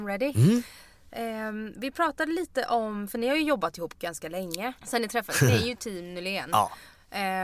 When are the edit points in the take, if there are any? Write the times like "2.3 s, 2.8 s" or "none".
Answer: 4.8 s